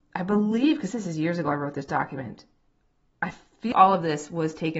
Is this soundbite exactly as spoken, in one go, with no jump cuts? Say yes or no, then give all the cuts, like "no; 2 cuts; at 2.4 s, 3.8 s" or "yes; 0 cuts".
no; 1 cut; at 3.7 s